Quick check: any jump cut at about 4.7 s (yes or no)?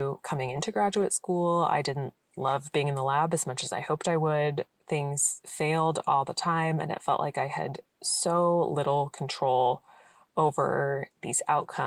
no